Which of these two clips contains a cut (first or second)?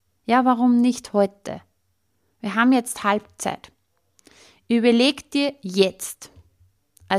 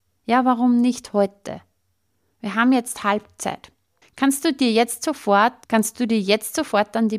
second